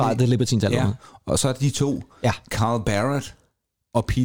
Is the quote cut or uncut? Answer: uncut